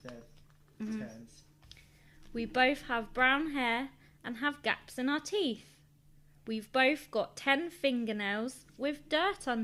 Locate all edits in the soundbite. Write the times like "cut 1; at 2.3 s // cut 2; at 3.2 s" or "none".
none